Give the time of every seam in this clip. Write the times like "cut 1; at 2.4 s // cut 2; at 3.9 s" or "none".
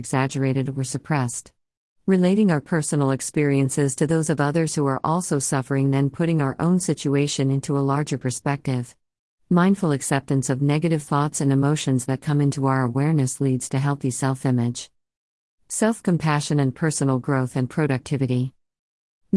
none